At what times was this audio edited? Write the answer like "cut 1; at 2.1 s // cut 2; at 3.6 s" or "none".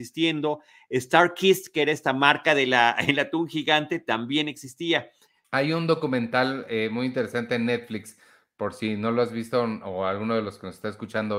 cut 1; at 5.4 s